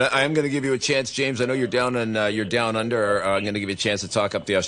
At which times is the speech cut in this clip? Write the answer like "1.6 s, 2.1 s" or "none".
none